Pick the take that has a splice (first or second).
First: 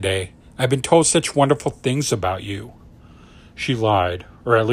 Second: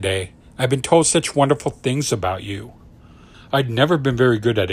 second